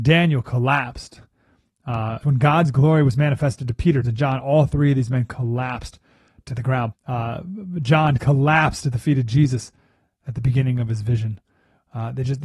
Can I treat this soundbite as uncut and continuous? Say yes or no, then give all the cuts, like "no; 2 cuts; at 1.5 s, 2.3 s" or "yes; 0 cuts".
no; 3 cuts; at 2.2 s, 4.0 s, 6.9 s